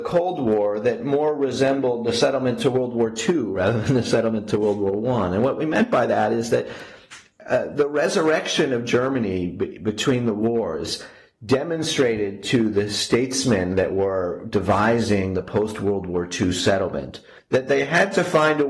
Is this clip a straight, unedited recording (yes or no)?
yes